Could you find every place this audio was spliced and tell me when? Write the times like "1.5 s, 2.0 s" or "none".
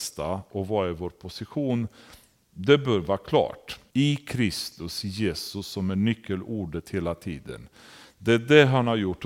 3.9 s